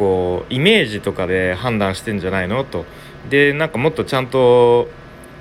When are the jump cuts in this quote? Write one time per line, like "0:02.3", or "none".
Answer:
0:03.2